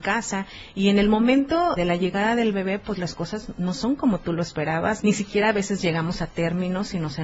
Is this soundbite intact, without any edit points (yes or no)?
no